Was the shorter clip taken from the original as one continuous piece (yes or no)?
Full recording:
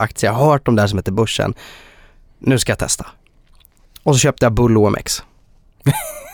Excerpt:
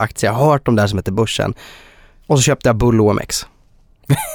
no